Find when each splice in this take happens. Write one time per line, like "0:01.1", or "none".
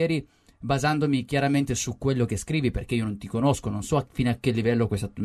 none